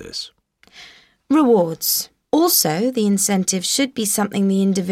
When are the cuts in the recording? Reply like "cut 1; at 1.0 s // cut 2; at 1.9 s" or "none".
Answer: cut 1; at 2.2 s